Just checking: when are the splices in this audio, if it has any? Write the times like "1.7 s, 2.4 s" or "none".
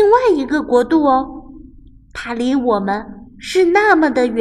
none